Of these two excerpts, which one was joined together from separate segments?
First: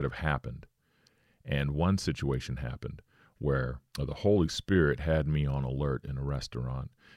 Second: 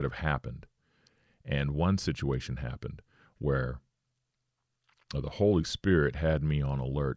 first; 1 cut; at 3.9 s

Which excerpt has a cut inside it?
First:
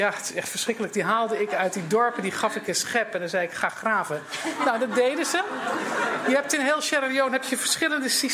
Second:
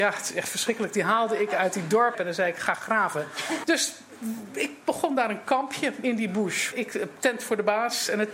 second; 3 cuts; at 2.1 s, 3.6 s, 6.7 s

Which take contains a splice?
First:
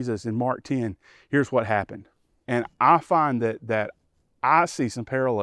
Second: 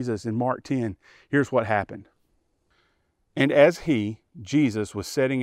first; 1 cut; at 2.4 s

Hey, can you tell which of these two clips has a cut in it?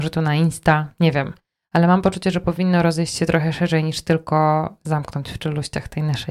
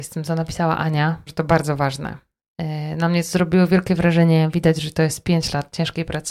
second; 1 cut; at 1.3 s

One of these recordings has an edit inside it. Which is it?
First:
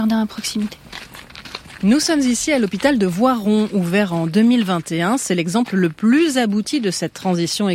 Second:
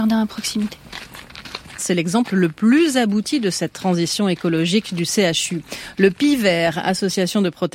second; 1 cut; at 1.8 s

